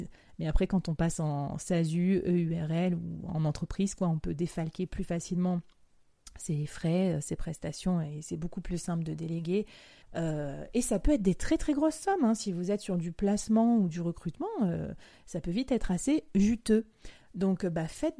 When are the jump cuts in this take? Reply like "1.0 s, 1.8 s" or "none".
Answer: 10.0 s

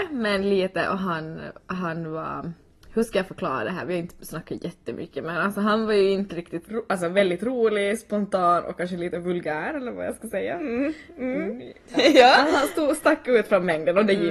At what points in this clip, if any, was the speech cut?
6.6 s

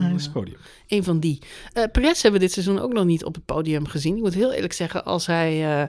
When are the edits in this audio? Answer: none

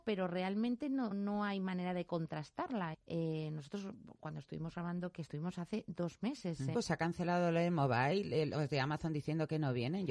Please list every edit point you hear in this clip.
1.1 s, 2.9 s, 6.7 s

